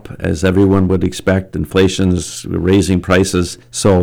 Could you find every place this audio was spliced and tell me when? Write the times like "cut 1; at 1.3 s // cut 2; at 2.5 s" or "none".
none